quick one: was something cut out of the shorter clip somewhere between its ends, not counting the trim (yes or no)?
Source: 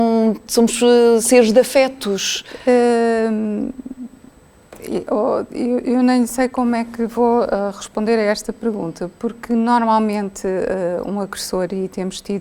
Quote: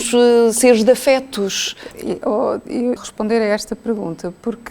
yes